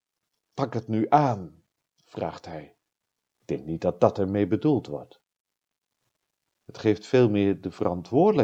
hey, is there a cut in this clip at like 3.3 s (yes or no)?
yes